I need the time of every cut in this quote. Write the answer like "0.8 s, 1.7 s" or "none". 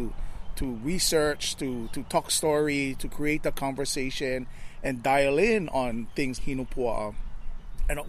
6.4 s